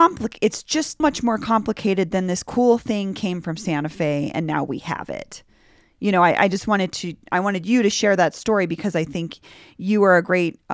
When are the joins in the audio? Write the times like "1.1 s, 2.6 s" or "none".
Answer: 1.0 s